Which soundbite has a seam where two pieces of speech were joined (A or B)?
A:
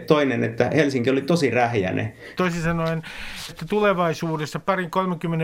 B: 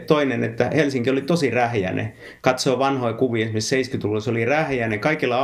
A